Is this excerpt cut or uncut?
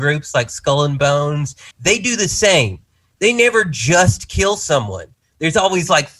cut